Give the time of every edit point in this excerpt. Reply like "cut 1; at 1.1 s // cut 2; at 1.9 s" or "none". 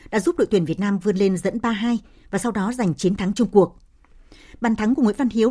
none